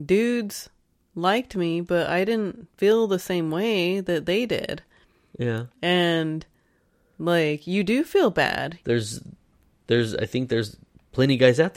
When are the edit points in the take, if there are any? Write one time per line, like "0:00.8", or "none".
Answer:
0:08.8

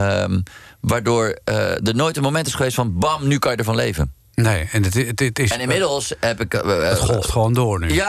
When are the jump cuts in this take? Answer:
none

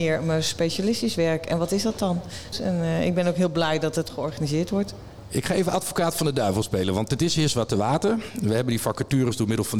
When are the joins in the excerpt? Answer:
0:02.5

